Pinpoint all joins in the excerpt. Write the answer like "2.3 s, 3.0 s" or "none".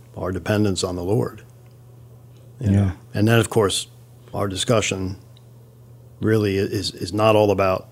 4.3 s